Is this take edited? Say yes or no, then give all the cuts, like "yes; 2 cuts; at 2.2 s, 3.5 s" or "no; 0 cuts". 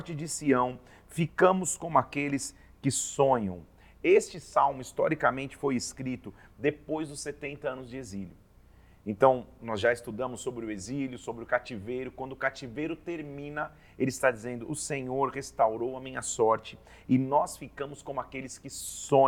no; 0 cuts